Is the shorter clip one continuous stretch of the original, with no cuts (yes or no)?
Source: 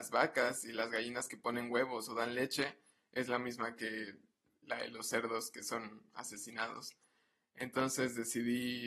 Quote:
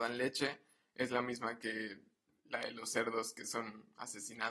yes